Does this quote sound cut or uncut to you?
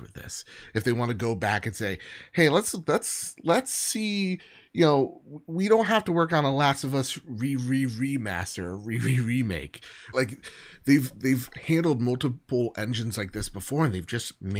cut